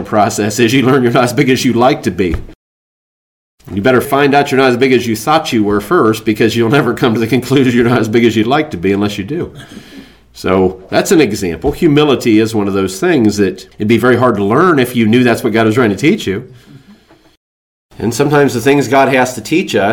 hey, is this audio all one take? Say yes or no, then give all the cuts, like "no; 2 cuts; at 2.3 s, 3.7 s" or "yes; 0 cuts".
yes; 0 cuts